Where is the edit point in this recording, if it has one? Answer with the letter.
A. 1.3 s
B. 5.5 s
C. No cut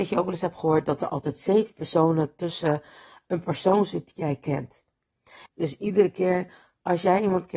B